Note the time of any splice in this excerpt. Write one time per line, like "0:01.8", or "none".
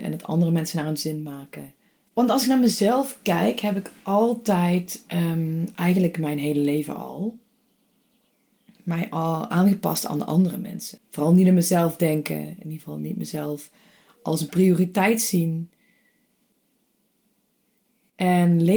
0:02.1
0:11.0